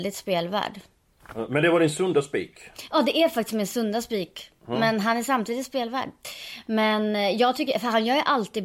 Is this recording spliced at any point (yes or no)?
no